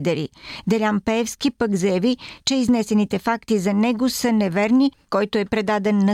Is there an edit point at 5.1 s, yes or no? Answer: yes